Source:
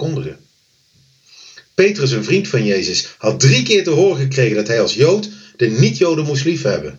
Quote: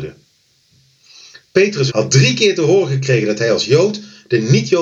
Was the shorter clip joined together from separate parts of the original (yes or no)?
yes